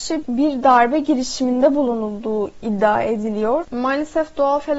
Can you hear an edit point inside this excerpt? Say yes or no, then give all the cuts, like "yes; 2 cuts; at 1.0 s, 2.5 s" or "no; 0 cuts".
yes; 1 cut; at 3.6 s